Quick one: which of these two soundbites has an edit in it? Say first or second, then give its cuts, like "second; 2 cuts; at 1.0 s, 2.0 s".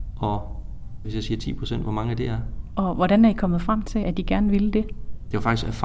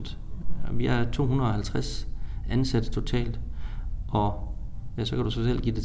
first; 1 cut; at 1.0 s